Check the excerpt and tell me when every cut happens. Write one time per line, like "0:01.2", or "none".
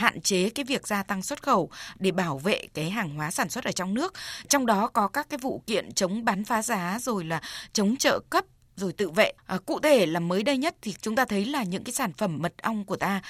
0:09.4